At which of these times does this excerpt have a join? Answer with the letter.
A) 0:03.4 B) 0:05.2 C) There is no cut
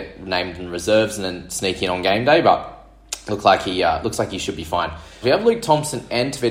B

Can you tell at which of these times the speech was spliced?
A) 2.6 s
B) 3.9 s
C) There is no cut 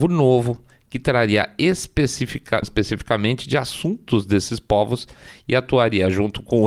A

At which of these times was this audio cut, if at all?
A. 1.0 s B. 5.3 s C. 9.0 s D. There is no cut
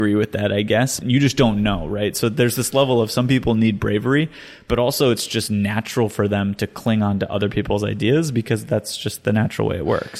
A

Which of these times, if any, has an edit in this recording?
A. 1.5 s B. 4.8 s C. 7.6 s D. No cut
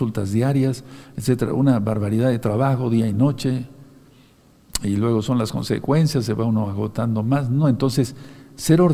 D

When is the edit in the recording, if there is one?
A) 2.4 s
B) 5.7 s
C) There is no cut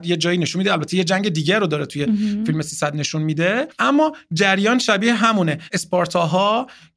C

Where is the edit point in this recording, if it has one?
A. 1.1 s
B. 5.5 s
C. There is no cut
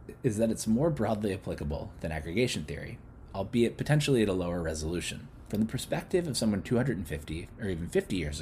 B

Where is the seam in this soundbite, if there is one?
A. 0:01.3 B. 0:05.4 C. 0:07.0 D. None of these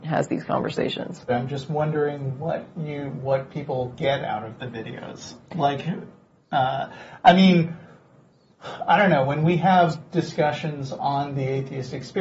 A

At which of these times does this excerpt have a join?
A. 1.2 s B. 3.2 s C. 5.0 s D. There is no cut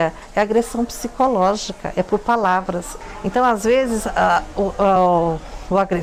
D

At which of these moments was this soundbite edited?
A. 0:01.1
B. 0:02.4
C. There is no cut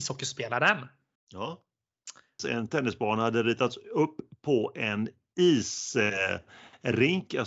B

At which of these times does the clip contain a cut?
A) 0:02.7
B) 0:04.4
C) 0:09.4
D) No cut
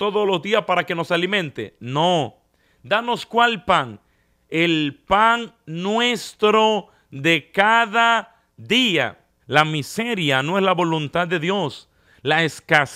C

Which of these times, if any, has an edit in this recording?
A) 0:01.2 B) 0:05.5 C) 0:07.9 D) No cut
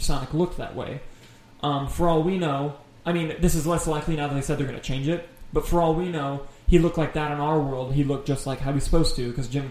C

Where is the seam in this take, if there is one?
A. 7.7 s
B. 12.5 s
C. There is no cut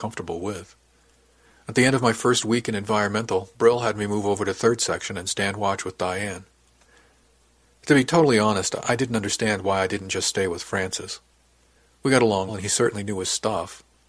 B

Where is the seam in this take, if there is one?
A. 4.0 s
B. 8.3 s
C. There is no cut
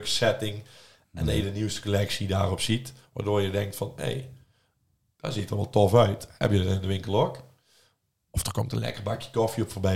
C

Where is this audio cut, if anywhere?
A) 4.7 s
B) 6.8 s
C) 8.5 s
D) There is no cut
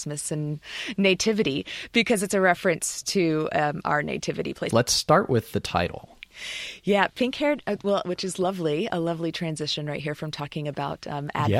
A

